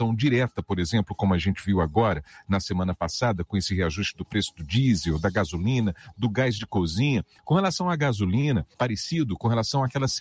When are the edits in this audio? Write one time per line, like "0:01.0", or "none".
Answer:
0:07.4
0:08.7